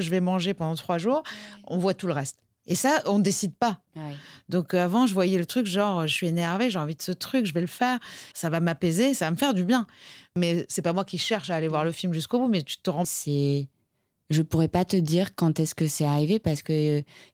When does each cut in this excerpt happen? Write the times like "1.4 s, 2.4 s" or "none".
3.9 s, 8.3 s, 13.0 s